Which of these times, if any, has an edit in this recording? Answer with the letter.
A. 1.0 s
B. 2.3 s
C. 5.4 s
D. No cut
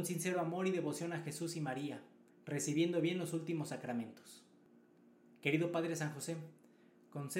B